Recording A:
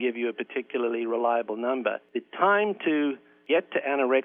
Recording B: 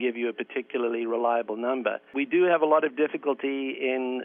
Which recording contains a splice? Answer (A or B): A